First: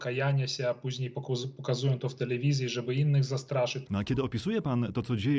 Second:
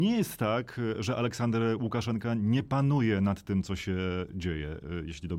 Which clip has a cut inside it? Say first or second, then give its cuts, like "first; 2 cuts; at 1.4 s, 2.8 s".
first; 1 cut; at 3.9 s